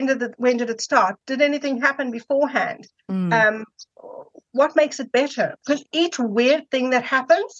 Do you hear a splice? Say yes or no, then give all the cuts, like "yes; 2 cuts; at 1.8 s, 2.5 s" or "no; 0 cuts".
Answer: yes; 1 cut; at 5.6 s